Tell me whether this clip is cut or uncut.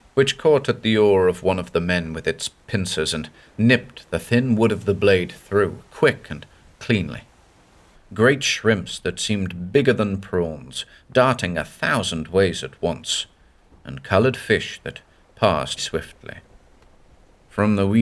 cut